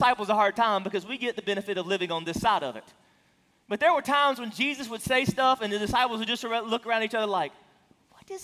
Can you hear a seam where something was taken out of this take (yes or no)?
no